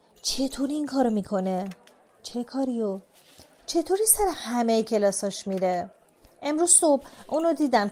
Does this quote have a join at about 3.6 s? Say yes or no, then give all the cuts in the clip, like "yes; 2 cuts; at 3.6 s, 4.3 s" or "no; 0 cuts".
no; 0 cuts